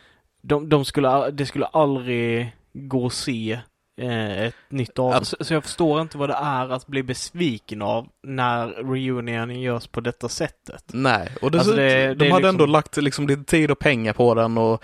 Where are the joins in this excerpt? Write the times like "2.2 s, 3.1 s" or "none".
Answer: 5.2 s